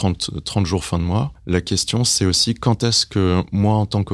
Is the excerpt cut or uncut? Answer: uncut